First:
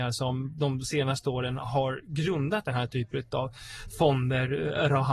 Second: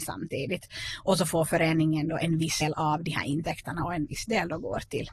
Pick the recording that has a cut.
second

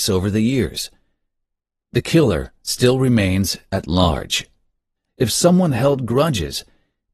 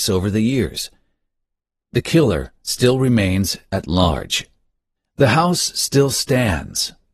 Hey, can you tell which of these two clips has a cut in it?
first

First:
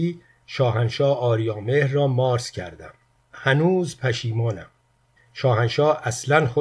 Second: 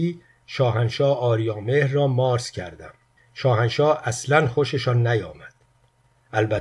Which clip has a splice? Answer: second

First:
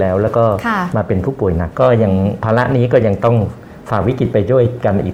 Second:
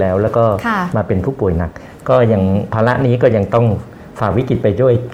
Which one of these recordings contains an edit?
first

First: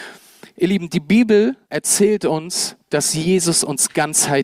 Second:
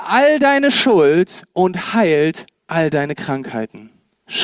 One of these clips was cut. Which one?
first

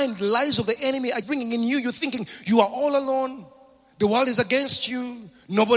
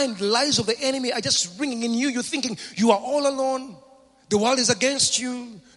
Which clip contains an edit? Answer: first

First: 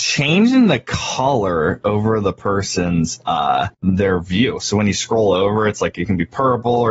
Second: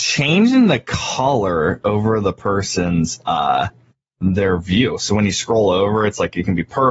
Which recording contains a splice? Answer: first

